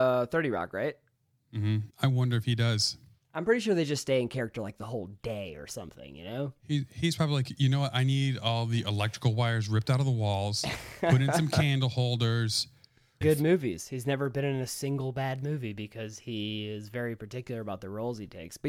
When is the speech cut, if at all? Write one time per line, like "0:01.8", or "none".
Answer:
0:01.9
0:13.2